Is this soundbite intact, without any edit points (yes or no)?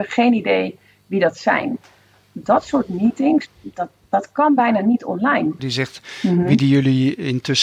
no